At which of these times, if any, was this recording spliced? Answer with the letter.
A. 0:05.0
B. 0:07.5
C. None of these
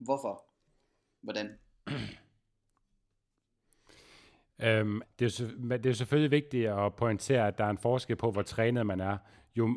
A